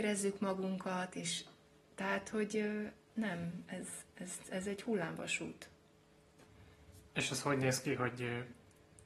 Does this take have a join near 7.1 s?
yes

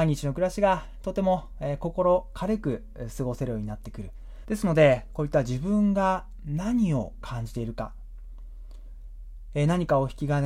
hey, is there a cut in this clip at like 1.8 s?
no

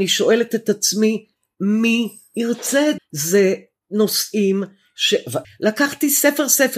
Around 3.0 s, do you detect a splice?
yes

